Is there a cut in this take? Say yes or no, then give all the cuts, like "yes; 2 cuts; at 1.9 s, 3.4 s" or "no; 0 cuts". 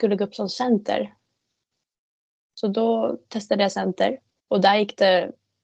yes; 1 cut; at 4.4 s